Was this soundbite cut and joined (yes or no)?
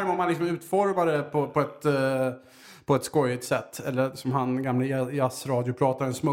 no